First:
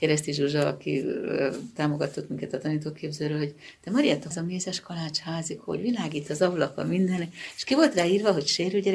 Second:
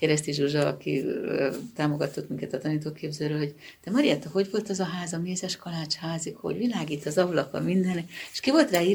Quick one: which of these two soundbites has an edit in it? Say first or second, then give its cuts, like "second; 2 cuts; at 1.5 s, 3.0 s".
first; 1 cut; at 4.3 s